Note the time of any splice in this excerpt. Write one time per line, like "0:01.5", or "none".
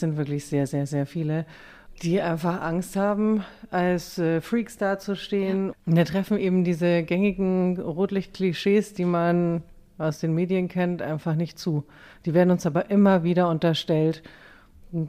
0:05.7